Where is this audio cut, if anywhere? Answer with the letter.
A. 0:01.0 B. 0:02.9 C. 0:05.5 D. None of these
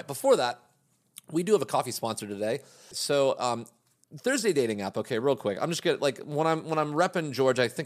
B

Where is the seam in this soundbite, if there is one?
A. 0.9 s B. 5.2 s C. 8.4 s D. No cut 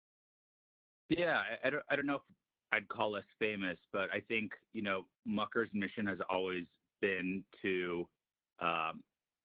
B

